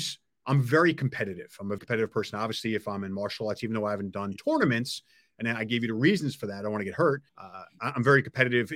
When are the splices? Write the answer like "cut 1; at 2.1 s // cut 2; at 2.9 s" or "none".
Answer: cut 1; at 1.8 s // cut 2; at 7.3 s

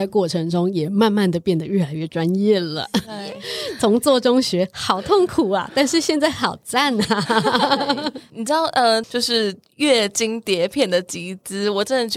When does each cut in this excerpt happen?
cut 1; at 9.0 s

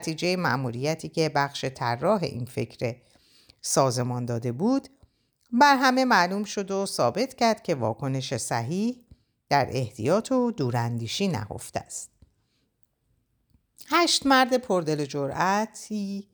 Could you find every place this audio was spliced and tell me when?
none

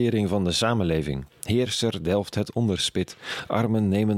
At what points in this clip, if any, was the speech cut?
none

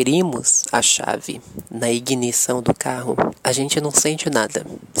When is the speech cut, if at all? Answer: cut 1; at 3.4 s

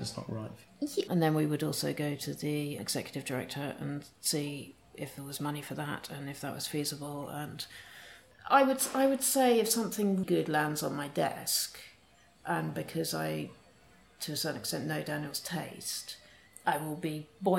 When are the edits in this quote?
cut 1; at 1.1 s // cut 2; at 2.8 s // cut 3; at 10.2 s

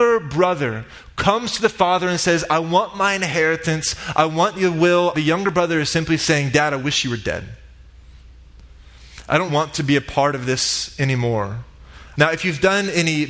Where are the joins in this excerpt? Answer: cut 1; at 5.1 s // cut 2; at 9.5 s // cut 3; at 12.1 s

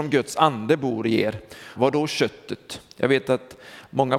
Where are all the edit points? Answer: cut 1; at 1.8 s

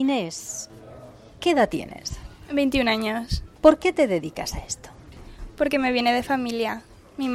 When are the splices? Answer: none

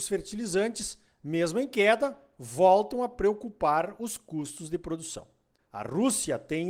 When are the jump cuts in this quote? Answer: cut 1; at 5.7 s

